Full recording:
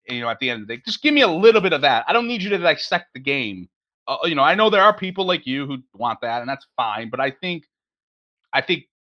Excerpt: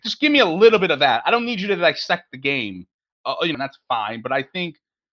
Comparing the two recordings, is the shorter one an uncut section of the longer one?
no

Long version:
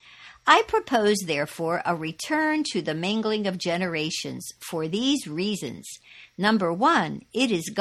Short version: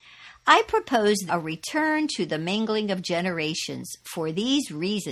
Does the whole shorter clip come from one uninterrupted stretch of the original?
no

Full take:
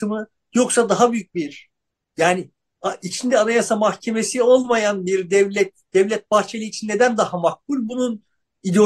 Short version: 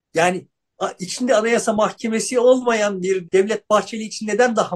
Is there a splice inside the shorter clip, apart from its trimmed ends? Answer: yes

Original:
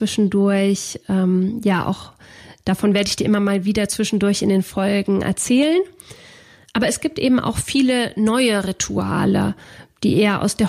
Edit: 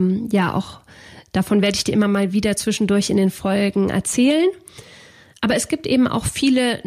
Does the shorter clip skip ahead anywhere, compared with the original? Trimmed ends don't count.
no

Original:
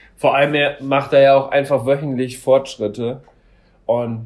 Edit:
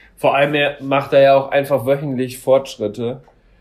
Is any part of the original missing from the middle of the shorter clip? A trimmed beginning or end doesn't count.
no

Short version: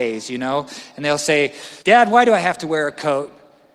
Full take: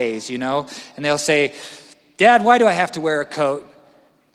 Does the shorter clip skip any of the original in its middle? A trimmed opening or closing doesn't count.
yes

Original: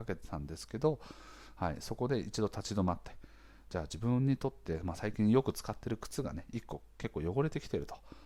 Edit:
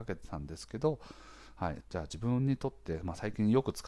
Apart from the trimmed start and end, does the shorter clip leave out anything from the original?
yes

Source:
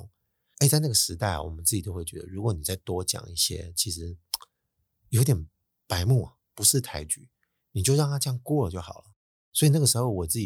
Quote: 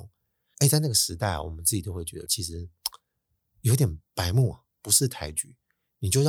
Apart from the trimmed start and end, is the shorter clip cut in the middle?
yes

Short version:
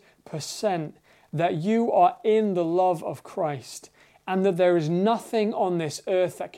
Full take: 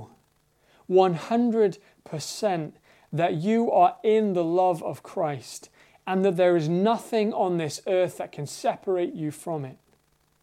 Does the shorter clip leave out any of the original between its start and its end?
no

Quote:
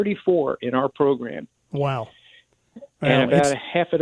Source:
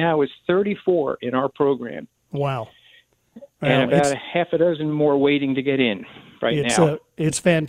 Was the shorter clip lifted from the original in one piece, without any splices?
yes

